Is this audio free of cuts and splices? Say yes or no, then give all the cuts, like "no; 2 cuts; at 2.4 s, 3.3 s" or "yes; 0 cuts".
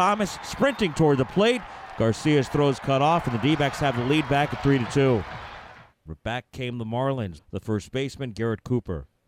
no; 2 cuts; at 6.1 s, 7.4 s